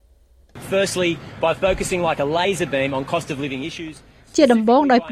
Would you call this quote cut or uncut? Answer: uncut